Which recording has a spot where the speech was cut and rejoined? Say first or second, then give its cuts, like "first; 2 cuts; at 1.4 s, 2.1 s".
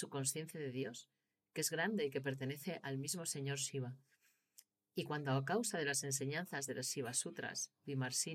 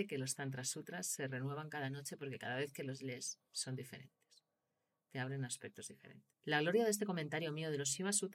second; 1 cut; at 6.3 s